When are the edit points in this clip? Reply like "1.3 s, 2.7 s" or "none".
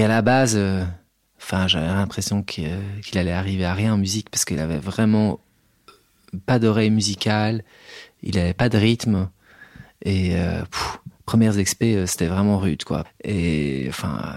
13.0 s